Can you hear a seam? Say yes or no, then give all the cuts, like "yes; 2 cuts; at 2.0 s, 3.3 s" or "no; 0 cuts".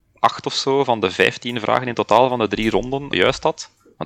yes; 1 cut; at 3.1 s